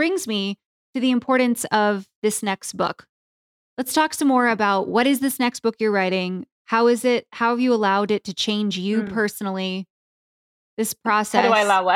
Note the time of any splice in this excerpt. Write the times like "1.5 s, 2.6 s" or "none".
none